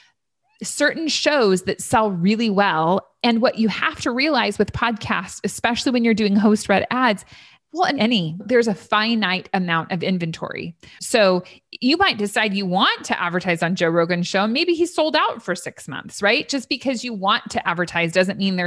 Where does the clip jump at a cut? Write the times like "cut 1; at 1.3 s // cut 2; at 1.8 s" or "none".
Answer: cut 1; at 8.0 s